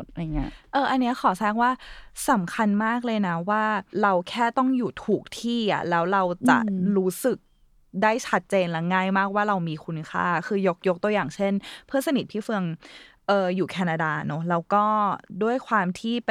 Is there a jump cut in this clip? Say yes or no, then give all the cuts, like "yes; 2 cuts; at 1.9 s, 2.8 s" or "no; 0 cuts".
no; 0 cuts